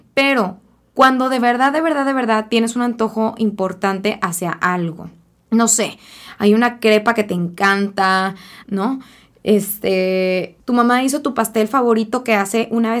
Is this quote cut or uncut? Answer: cut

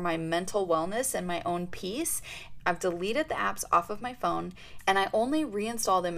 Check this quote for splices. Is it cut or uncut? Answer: cut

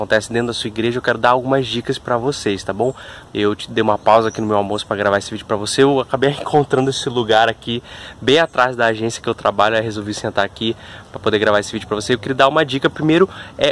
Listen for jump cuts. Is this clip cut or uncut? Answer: cut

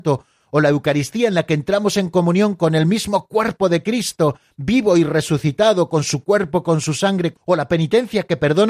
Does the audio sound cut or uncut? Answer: cut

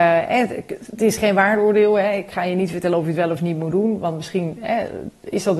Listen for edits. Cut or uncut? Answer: uncut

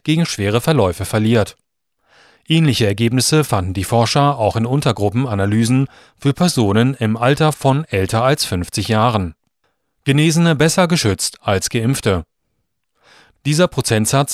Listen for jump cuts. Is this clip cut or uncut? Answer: uncut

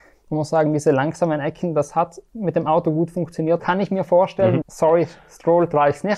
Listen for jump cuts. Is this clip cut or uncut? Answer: cut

